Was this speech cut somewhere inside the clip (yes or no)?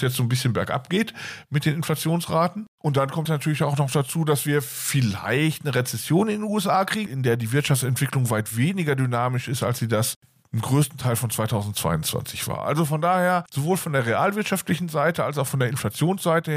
yes